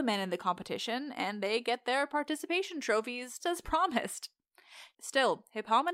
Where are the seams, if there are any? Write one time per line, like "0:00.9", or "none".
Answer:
0:03.4
0:04.9